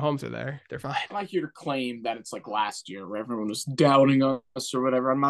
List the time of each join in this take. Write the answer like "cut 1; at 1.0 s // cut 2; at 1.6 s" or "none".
none